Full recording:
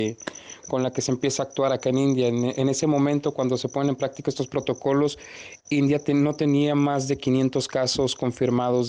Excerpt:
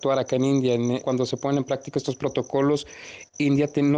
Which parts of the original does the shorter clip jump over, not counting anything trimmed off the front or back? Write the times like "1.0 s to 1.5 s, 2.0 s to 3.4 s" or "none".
2.5 s to 3.3 s